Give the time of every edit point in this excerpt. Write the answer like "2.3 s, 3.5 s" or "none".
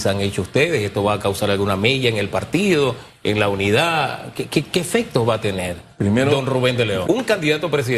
4.5 s, 7.0 s